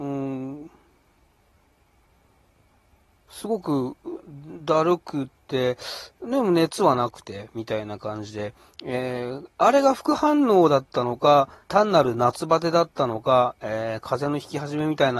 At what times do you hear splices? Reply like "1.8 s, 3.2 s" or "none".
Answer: 11.6 s